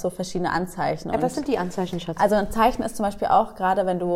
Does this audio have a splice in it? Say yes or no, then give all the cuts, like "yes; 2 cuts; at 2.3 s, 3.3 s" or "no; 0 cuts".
no; 0 cuts